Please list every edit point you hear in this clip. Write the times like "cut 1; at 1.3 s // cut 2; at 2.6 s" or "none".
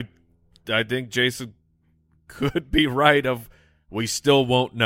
none